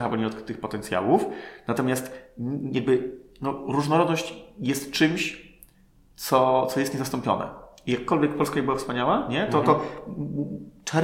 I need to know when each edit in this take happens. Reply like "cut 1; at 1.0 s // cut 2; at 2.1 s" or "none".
none

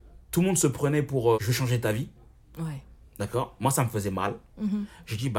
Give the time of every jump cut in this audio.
cut 1; at 1.3 s

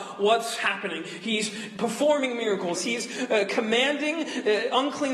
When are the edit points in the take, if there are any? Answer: cut 1; at 2.8 s

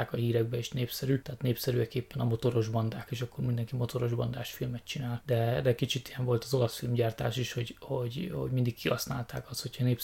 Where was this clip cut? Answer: none

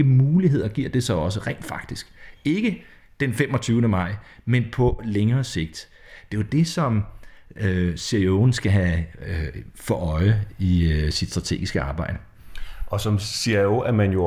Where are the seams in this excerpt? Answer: none

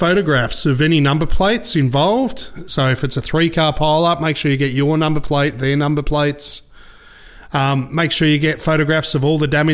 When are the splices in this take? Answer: none

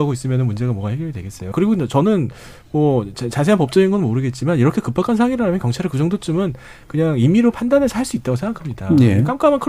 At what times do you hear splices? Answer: cut 1; at 1.5 s

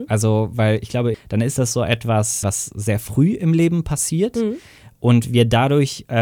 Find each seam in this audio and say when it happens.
cut 1; at 1.1 s // cut 2; at 2.4 s

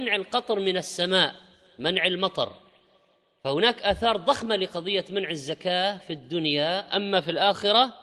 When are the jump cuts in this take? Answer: none

